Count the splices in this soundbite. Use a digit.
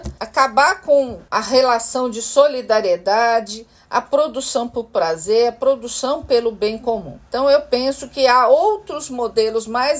1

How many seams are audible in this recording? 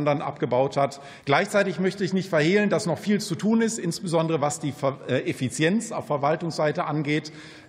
1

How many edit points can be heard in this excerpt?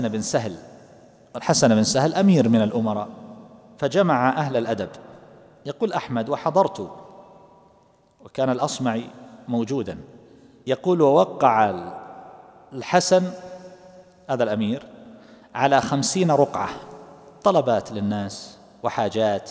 0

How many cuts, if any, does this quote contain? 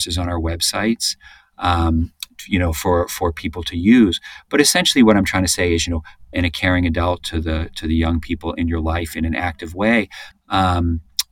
2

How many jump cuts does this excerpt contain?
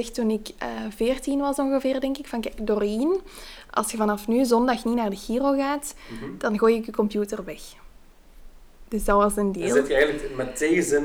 0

